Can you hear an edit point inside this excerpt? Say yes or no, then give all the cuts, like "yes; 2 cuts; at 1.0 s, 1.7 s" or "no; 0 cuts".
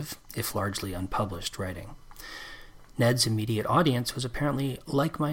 no; 0 cuts